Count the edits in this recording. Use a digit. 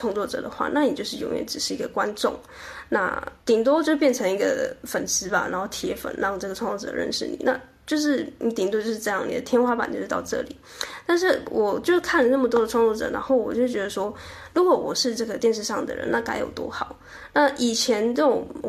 1